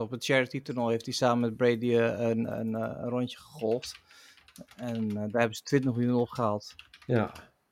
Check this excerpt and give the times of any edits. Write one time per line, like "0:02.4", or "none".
none